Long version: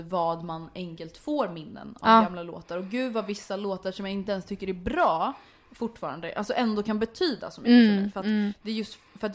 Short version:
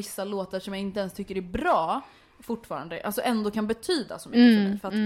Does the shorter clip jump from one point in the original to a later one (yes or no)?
no